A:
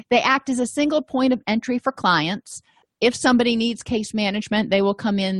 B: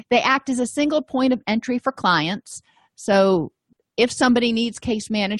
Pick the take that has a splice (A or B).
A